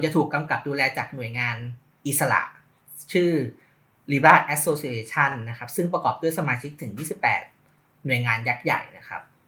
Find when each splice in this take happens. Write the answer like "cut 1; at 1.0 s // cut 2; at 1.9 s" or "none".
none